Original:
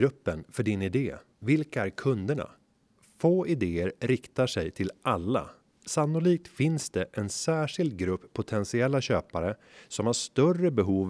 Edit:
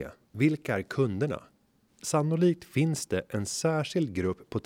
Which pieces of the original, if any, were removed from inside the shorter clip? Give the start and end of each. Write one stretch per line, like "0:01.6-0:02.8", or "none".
0:02.9-0:05.7